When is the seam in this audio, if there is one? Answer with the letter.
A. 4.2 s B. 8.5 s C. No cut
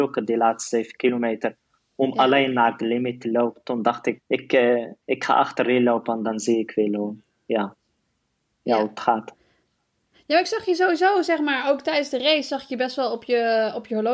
A